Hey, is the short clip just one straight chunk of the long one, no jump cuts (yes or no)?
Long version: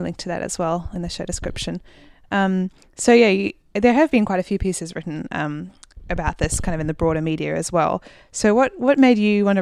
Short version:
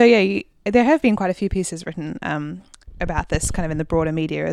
yes